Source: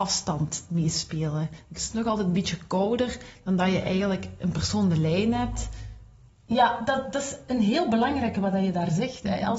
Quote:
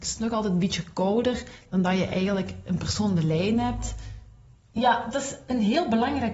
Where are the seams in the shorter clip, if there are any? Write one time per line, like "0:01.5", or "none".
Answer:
0:05.1